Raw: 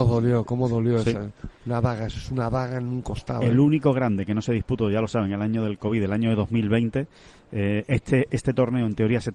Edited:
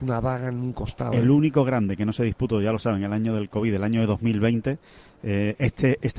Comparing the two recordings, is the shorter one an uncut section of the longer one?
yes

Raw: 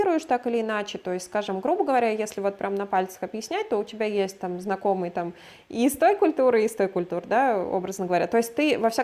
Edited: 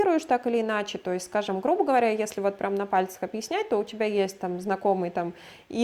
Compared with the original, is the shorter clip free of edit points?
yes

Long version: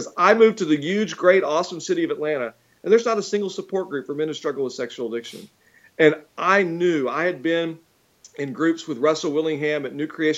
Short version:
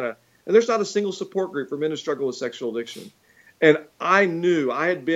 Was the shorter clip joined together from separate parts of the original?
no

